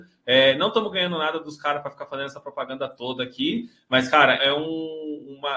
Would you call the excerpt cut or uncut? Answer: cut